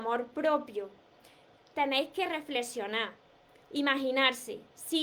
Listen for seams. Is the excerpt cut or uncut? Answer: uncut